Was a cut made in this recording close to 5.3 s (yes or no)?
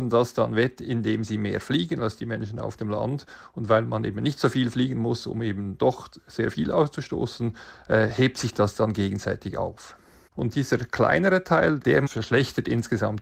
no